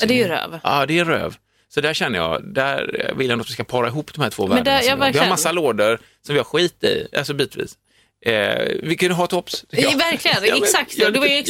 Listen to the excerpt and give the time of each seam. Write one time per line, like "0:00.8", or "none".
none